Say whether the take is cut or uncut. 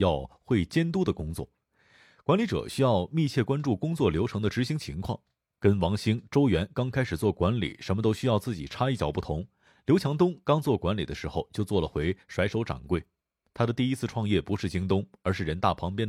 uncut